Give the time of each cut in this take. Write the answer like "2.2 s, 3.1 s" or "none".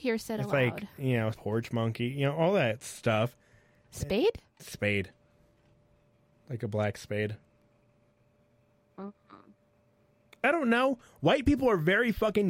1.3 s